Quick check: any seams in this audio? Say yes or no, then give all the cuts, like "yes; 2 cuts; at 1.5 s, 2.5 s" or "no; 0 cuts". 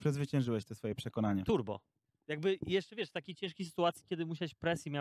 no; 0 cuts